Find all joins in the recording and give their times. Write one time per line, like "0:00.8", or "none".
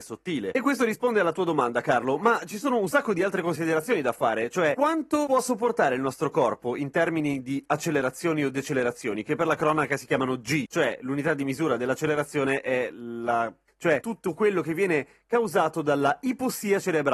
0:13.7